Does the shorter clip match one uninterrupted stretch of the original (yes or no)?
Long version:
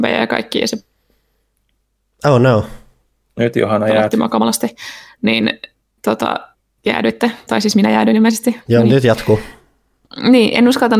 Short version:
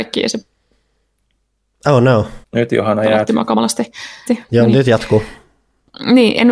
no